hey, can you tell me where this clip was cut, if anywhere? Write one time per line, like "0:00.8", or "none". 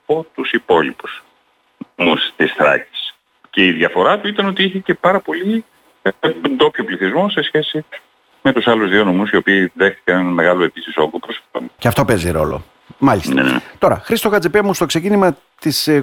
0:03.4
0:11.8